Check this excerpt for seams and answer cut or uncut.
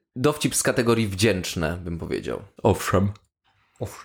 cut